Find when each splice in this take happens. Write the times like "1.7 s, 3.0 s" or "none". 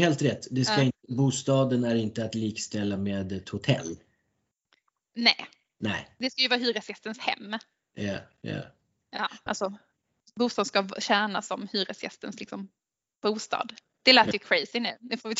9.5 s